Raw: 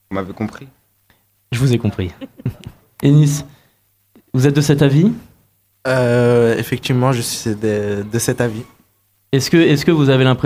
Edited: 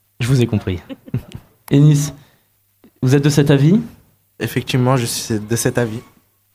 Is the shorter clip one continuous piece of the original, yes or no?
no